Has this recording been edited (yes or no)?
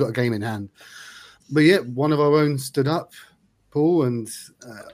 yes